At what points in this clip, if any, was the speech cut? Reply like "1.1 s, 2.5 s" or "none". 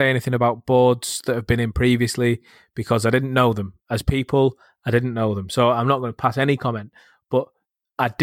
none